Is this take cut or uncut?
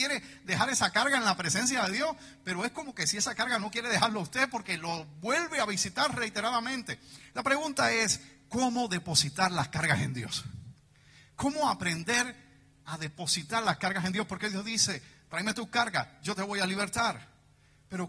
uncut